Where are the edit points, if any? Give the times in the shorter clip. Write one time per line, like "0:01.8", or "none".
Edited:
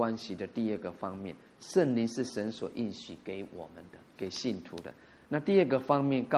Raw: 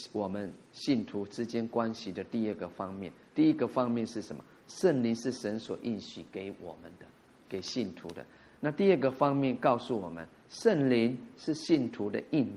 0:01.5
0:04.1